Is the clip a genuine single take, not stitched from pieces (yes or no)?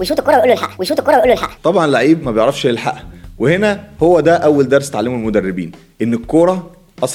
yes